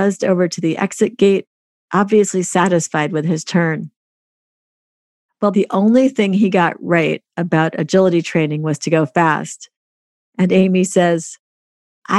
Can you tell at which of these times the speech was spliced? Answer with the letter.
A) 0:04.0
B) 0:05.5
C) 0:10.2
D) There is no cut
B